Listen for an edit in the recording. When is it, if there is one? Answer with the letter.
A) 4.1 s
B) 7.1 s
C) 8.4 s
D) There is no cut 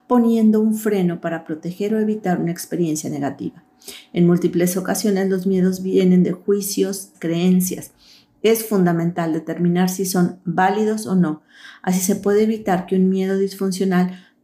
B